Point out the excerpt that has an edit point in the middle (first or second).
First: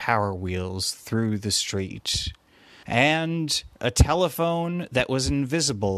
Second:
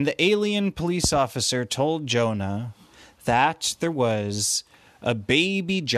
first